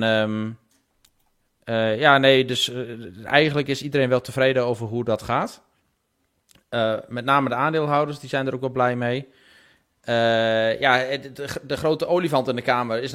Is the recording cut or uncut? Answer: uncut